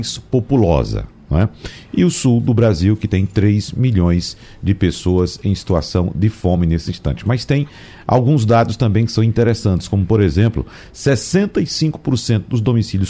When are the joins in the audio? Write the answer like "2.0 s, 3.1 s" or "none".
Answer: none